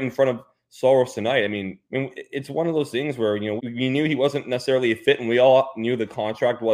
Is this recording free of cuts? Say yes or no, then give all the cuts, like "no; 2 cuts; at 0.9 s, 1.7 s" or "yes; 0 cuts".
no; 2 cuts; at 1.8 s, 3.6 s